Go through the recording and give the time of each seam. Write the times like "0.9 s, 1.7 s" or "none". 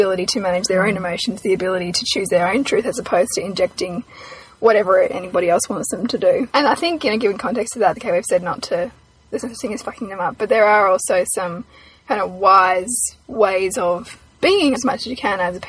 6.5 s, 8.0 s, 14.7 s